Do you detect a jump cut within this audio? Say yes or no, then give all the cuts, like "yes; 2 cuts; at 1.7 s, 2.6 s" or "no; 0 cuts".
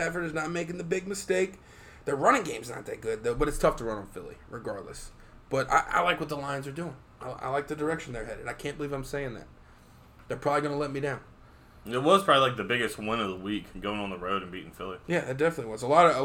no; 0 cuts